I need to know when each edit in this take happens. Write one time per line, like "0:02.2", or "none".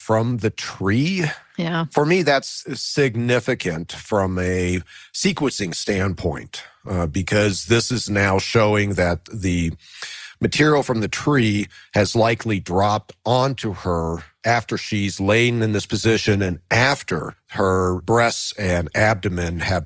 none